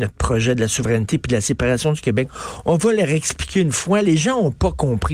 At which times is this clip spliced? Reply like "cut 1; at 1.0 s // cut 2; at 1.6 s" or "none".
none